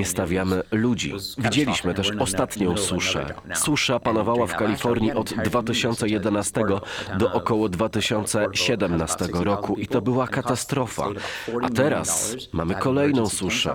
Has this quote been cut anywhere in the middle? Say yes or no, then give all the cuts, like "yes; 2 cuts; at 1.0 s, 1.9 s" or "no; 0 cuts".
no; 0 cuts